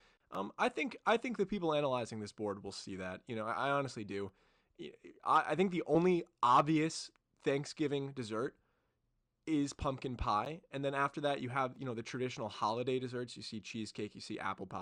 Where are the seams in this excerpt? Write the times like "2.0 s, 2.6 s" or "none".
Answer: none